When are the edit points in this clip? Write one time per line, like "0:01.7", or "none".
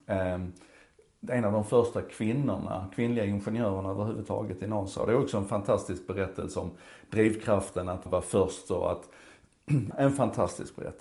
0:08.1
0:09.9